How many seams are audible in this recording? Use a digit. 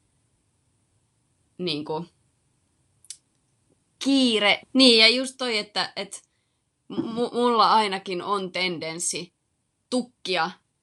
1